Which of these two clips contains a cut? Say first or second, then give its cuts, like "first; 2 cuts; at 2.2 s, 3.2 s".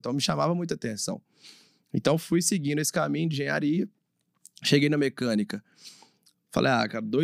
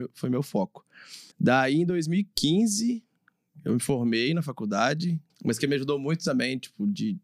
second; 2 cuts; at 1.3 s, 5.3 s